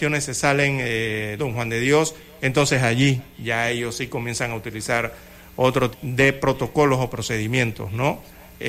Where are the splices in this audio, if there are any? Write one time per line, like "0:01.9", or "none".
0:01.4
0:05.9